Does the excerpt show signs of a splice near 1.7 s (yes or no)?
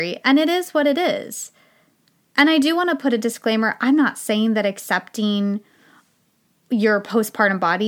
no